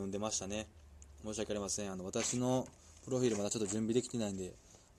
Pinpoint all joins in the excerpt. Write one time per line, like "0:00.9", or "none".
none